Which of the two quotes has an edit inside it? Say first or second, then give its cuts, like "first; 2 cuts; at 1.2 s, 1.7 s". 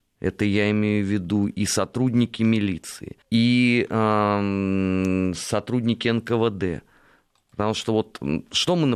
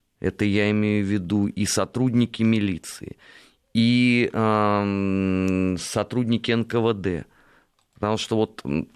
first; 1 cut; at 3.2 s